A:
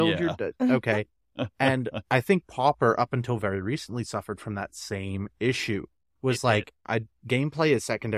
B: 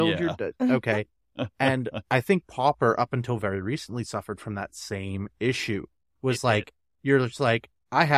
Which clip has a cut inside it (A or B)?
A